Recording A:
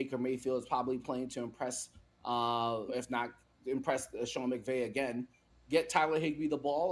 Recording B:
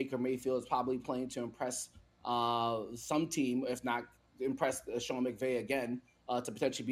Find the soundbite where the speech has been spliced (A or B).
A